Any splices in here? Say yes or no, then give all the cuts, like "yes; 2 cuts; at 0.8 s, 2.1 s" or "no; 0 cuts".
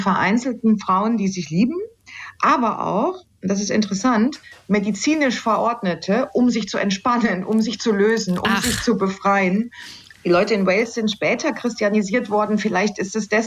yes; 1 cut; at 10.2 s